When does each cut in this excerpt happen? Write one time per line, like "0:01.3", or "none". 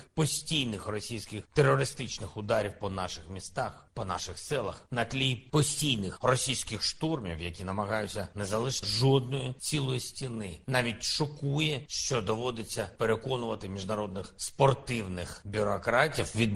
0:08.8